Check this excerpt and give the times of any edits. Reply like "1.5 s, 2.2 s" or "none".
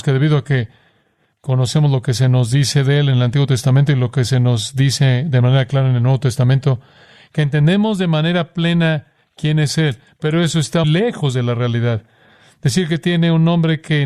10.8 s